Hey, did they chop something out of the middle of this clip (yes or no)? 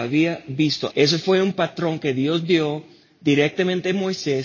yes